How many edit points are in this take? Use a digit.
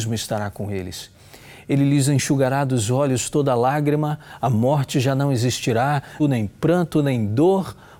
1